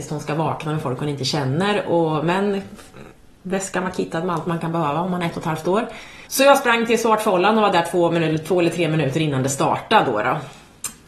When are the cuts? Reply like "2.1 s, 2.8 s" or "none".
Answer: 6.3 s